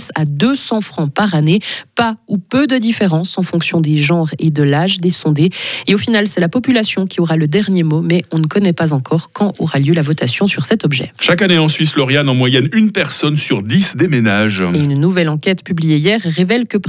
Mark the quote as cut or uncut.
uncut